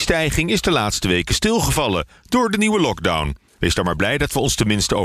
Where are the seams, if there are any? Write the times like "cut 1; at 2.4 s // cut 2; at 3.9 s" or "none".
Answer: cut 1; at 3.5 s